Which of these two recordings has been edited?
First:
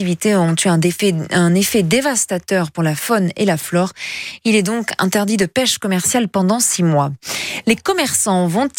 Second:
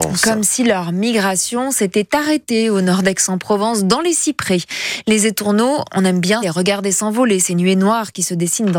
second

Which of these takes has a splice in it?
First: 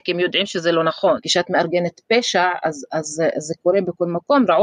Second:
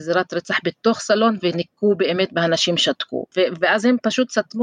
first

